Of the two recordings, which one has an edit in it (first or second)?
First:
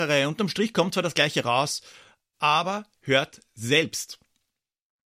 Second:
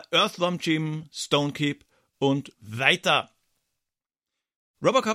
second